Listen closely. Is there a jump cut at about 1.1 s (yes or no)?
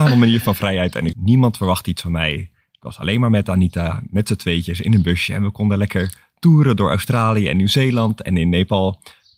yes